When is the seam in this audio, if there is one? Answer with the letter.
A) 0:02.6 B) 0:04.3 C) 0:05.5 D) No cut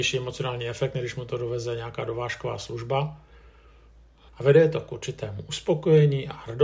B